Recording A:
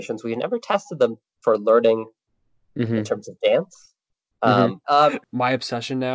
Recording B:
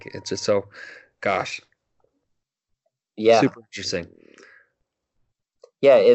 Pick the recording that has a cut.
A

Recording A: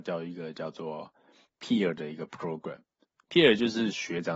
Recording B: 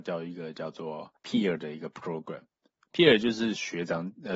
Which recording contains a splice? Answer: B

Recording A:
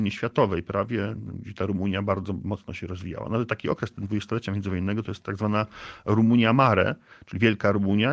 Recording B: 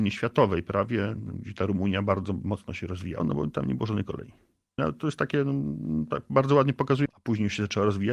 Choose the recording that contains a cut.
B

